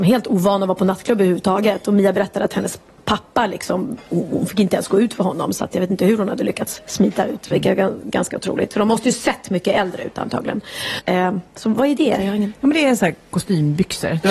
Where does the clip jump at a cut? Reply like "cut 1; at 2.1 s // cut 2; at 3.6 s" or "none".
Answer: cut 1; at 7.5 s // cut 2; at 11.0 s